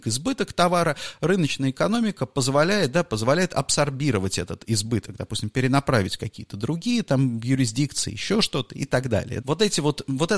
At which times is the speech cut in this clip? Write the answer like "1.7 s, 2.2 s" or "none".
9.4 s